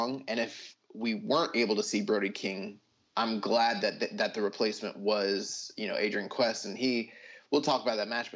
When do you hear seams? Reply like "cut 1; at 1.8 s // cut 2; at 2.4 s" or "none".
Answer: none